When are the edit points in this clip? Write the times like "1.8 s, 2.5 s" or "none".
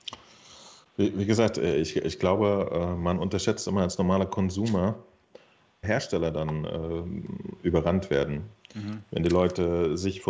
5.8 s